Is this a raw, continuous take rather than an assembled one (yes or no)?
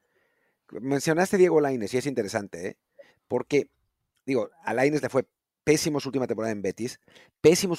no